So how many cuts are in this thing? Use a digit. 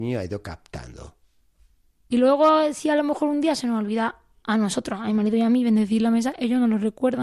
1